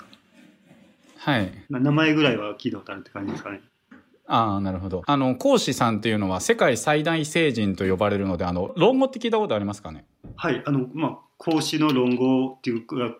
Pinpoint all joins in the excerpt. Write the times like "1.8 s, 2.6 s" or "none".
1.6 s, 3.7 s, 5.0 s